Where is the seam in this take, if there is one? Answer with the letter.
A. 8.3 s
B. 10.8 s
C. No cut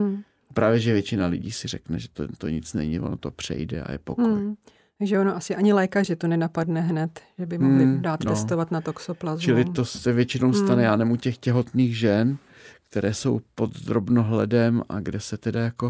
C